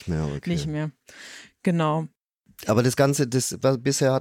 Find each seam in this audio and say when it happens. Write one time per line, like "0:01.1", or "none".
none